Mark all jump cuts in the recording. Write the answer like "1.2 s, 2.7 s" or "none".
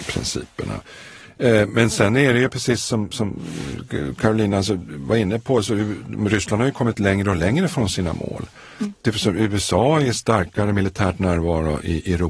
none